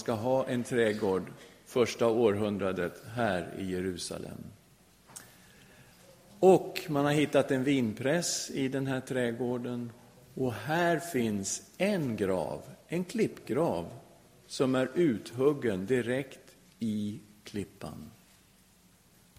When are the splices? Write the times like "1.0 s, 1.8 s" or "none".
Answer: none